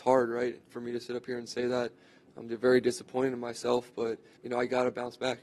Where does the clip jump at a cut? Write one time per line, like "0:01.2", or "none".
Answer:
0:04.4